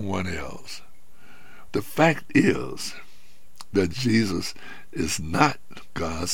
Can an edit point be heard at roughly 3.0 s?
no; 1 cut; at 1.7 s

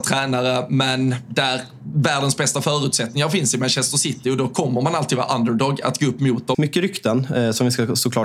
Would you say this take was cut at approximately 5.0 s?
no; 1 cut; at 6.5 s

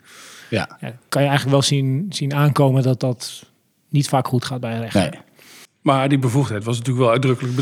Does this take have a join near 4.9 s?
no; 0 cuts

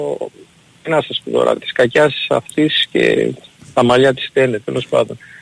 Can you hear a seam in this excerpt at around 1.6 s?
no; 0 cuts

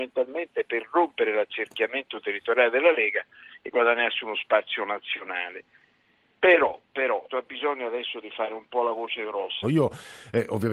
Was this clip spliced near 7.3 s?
yes; 2 cuts; at 7.3 s, 9.6 s

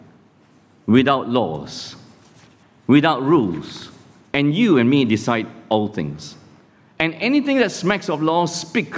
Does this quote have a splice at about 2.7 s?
no; 2 cuts; at 4.3 s, 6.8 s

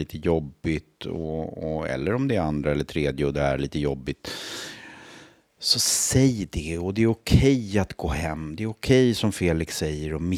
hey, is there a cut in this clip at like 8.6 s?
no; 0 cuts

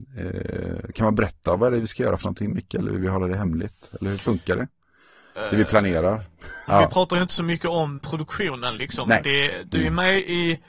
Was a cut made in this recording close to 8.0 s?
yes; 3 cuts; at 6.7 s, 8.0 s, 9.2 s

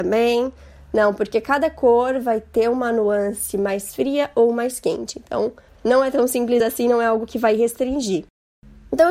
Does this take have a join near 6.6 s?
no; 0 cuts

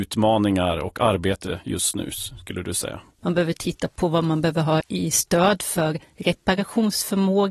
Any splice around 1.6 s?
no; 2 cuts; at 3.2 s, 4.8 s

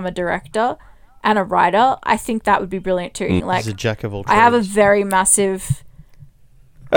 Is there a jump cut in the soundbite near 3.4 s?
yes; 1 cut; at 3.4 s

